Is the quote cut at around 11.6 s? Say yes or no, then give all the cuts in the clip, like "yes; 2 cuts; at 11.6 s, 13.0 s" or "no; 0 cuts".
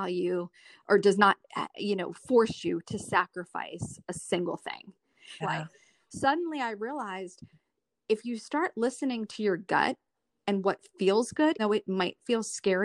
yes; 2 cuts; at 5.4 s, 11.6 s